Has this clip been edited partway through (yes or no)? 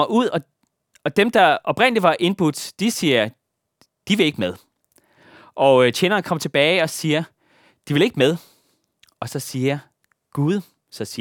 no